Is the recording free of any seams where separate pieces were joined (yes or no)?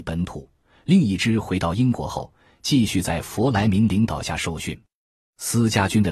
yes